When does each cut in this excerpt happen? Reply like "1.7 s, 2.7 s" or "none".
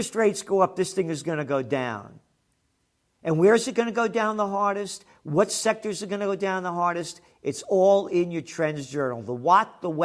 none